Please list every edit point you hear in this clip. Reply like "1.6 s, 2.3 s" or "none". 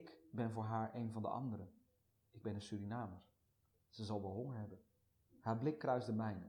3.8 s